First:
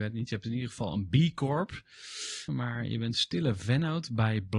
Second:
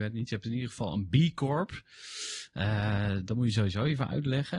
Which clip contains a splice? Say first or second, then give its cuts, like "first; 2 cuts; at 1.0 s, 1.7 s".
first; 1 cut; at 2.5 s